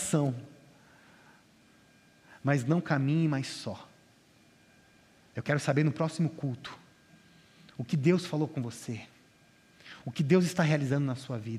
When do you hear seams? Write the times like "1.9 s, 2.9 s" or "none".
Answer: 5.3 s